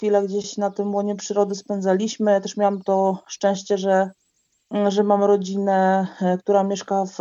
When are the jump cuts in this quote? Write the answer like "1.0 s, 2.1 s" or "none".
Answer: none